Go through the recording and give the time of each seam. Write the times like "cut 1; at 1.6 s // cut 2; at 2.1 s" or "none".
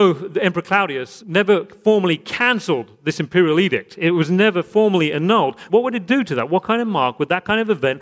cut 1; at 1.2 s // cut 2; at 5.7 s